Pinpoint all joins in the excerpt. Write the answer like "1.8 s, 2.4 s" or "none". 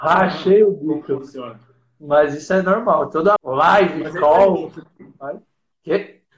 3.4 s